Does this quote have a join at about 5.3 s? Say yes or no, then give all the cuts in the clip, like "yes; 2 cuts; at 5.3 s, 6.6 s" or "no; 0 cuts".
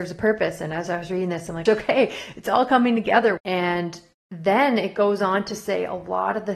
no; 2 cuts; at 1.7 s, 3.4 s